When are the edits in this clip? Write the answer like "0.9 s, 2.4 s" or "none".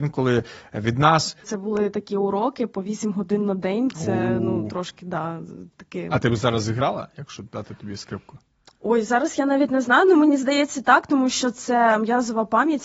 1.4 s